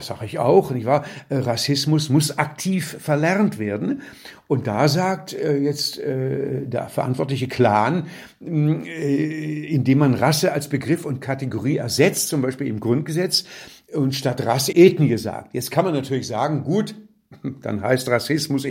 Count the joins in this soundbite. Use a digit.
1